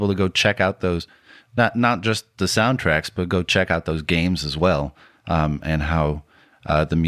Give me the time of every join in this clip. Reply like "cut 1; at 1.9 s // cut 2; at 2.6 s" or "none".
none